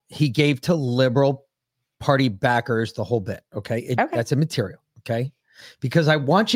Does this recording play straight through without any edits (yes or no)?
yes